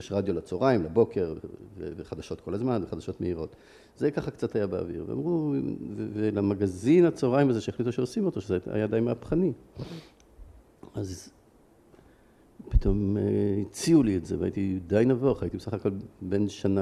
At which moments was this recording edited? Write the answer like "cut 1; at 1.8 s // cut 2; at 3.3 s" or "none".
none